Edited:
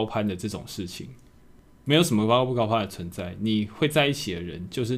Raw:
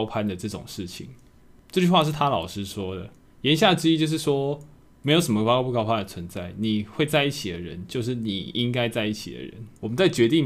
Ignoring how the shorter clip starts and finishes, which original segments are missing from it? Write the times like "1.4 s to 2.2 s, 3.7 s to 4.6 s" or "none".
1.6 s to 4.8 s